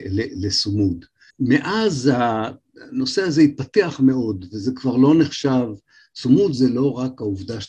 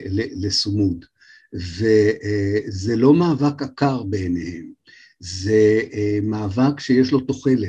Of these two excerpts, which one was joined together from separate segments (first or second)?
first